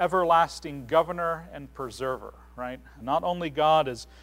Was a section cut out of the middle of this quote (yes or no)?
yes